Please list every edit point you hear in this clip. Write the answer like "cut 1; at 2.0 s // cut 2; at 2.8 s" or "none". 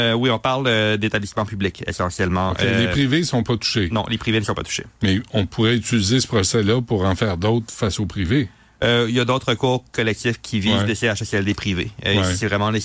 none